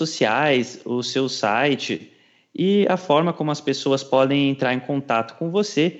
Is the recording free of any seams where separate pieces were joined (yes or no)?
yes